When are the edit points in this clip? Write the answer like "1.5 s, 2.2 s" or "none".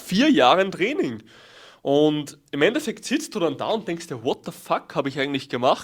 none